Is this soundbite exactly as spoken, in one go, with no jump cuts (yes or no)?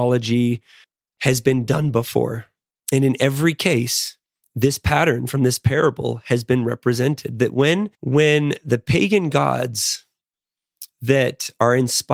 no